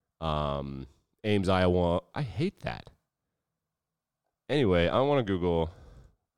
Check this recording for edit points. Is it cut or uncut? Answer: cut